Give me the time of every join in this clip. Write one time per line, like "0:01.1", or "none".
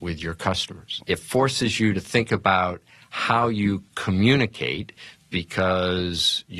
0:01.0